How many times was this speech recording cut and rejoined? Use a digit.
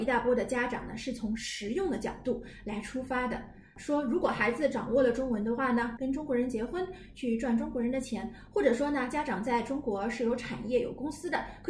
1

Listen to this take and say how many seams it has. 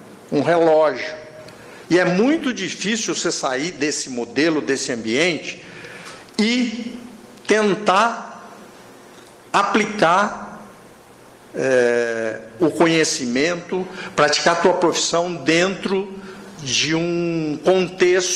1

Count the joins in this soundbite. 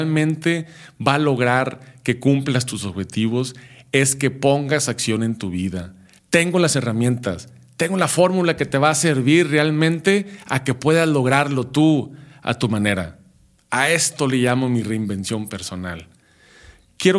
1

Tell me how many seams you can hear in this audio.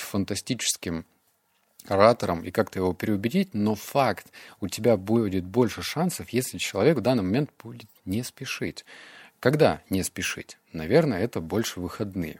0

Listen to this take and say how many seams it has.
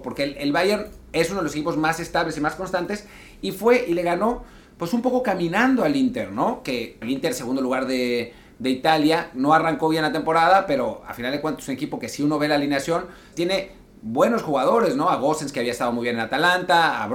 2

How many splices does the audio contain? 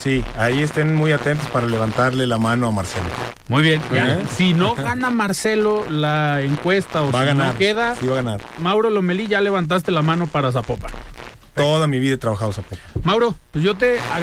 3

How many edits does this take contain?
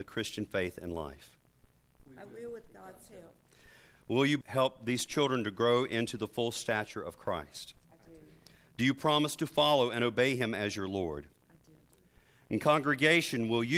2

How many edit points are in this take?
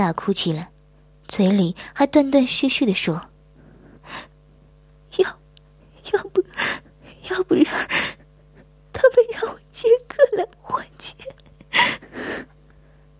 0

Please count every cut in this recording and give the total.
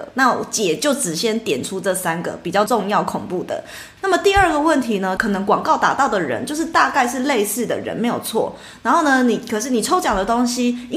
3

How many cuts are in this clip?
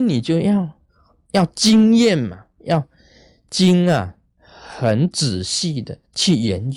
0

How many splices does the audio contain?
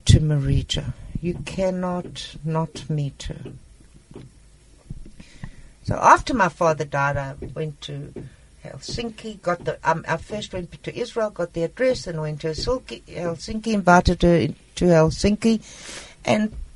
0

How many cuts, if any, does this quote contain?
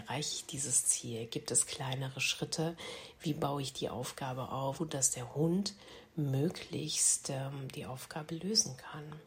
1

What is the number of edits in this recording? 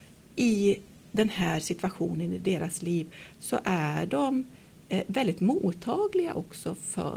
0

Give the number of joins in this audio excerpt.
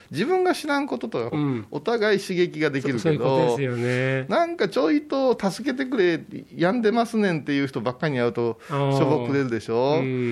1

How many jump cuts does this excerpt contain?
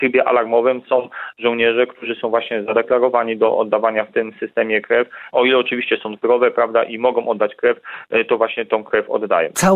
1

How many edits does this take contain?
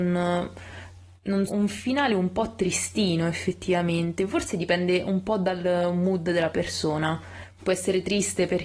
2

